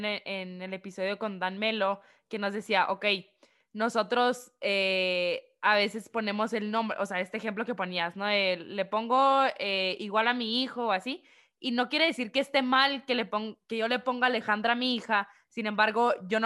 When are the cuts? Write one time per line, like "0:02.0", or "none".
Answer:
none

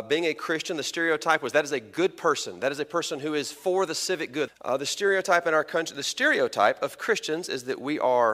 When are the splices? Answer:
0:04.5

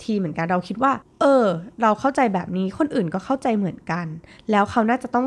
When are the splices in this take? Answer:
none

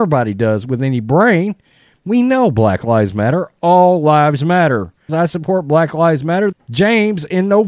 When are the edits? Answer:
0:05.1
0:06.5

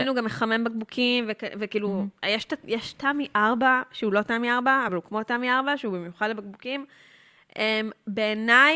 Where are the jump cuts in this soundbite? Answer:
none

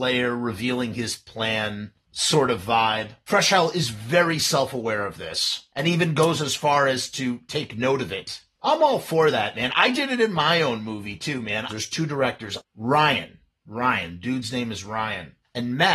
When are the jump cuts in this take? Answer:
0:11.7

